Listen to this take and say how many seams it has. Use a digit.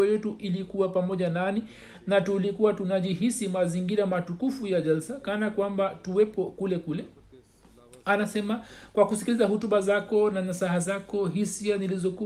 0